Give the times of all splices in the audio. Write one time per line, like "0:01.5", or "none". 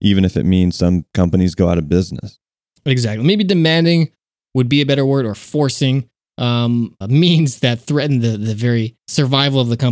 0:07.0